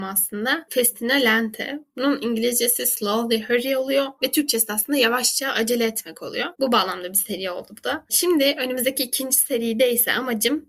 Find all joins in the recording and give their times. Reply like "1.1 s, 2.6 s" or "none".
6.5 s